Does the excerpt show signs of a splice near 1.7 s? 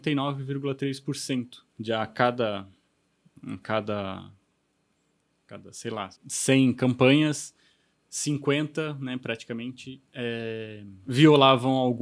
yes; 2 cuts; at 1.7 s, 6.2 s

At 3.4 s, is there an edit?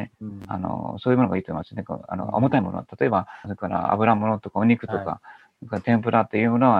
yes; 1 cut; at 3.4 s

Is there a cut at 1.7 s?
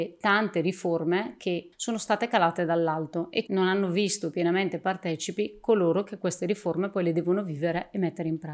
yes; 2 cuts; at 1.7 s, 3.5 s

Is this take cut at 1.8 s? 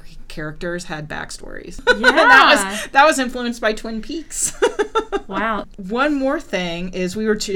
no; 1 cut; at 5.6 s

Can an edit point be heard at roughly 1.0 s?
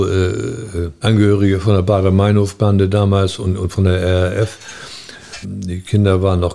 yes; 2 cuts; at 1.0 s, 5.4 s

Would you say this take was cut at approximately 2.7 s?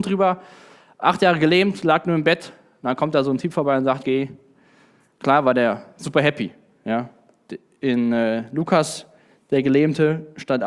no; 1 cut; at 4.0 s

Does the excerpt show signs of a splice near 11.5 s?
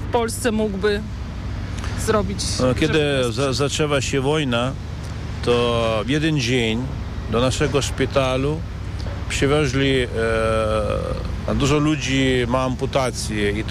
yes; 1 cut; at 11.5 s

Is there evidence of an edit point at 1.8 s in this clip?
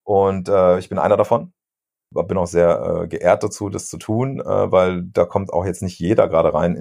no; 0 cuts

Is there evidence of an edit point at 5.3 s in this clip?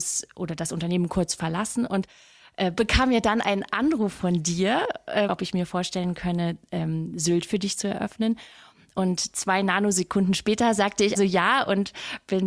yes; 2 cuts; at 5.3 s, 11.1 s

